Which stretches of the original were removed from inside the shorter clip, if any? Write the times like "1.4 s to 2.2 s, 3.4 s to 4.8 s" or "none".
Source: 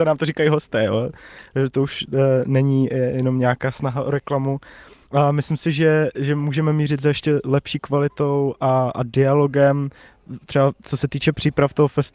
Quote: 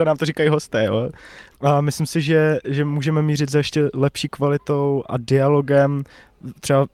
1.5 s to 5.0 s, 8.6 s to 8.9 s